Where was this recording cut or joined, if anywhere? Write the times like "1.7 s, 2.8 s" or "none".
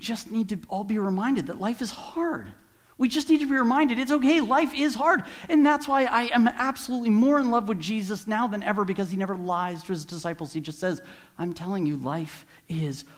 none